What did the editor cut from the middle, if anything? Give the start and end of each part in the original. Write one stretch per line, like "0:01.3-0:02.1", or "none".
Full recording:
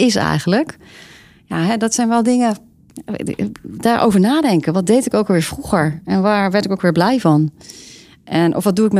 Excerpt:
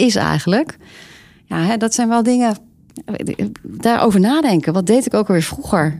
none

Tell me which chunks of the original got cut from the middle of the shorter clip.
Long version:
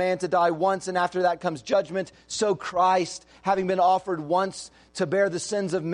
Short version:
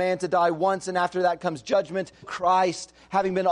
0:02.2-0:02.5

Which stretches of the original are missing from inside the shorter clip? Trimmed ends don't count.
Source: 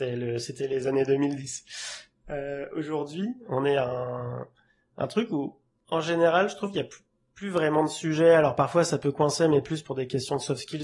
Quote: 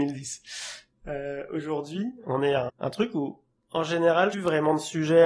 0:03.9-0:04.8
0:06.5-0:07.4

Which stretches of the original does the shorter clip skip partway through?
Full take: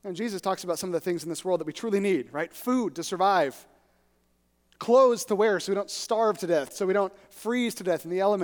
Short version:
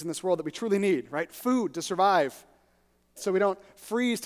0:04.4-0:06.7

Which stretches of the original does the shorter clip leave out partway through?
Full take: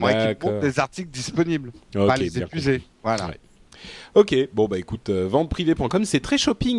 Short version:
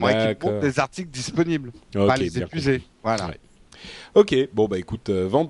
none

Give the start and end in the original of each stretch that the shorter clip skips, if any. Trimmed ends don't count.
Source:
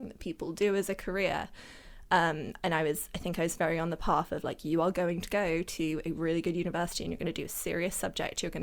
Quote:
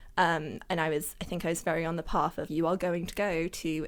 0:04.4-0:04.6

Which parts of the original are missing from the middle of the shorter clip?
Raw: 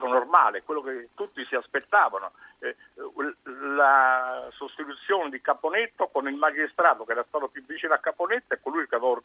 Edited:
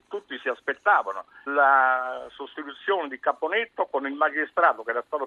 0:02.5-0:03.7

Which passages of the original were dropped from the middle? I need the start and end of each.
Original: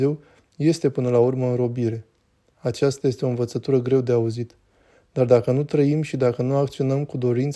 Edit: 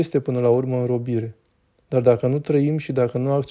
0:02.5-0:05.1

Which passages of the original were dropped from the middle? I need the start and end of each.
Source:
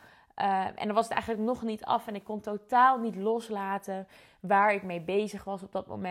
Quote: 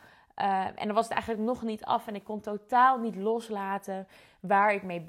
none

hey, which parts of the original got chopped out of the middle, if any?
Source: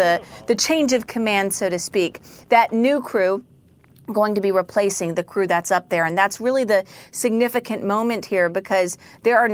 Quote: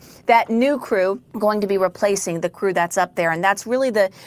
0:03.5-0:04.0

